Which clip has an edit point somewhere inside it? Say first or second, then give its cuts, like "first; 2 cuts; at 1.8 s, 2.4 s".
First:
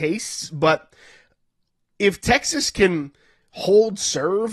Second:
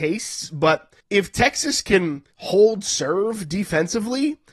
second; 2 cuts; at 1.0 s, 2.3 s